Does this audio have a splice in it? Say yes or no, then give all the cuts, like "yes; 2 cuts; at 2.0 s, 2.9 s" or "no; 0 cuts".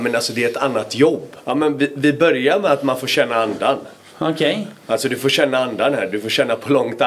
yes; 1 cut; at 1.4 s